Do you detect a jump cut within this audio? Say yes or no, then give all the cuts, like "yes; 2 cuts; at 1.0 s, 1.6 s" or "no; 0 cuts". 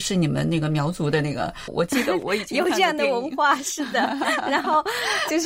yes; 1 cut; at 1.7 s